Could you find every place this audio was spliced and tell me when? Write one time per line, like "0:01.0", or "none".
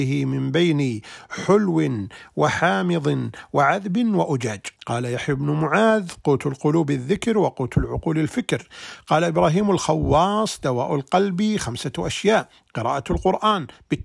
0:04.8